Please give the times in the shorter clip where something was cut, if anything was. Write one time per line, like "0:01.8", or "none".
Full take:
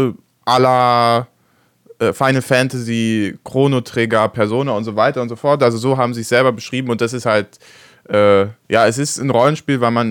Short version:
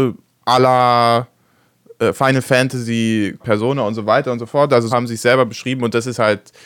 0:03.4
0:04.9